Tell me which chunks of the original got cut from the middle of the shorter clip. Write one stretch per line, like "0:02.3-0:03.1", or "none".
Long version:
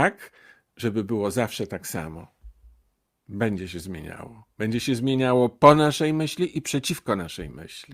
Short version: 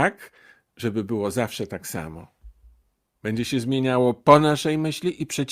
0:03.2-0:04.5

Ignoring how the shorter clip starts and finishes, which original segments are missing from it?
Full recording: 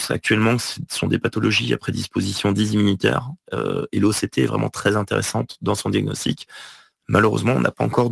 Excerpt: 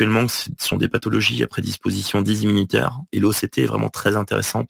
0:03.4-0:03.9

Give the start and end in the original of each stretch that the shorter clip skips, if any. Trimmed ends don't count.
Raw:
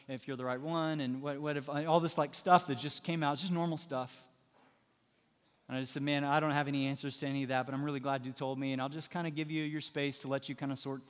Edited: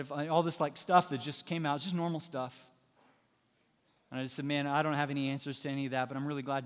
none

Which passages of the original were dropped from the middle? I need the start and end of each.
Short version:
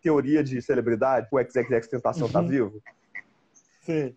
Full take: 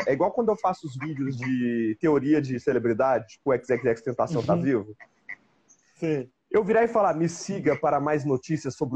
0:03.3-0:03.4

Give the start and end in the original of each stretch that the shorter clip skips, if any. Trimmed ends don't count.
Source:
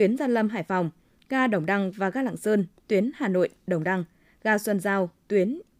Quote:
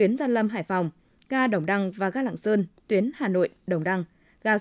none

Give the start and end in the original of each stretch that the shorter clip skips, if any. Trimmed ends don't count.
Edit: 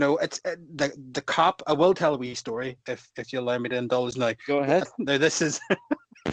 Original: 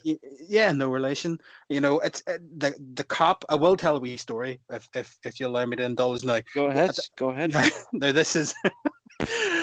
0:04.6-0:04.9
0:06.9-0:07.8

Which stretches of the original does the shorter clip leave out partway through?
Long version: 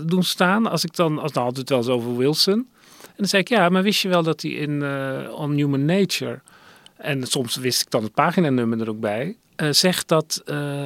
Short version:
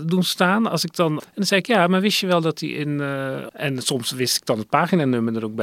0:01.2-0:03.0
0:05.3-0:06.9

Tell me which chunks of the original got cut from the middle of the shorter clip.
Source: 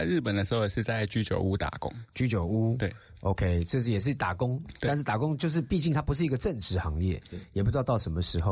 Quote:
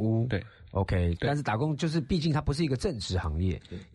0:03.7-0:04.8

